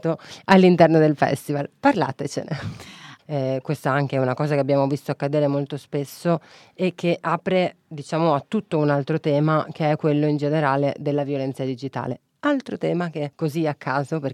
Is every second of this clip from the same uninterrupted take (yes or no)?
no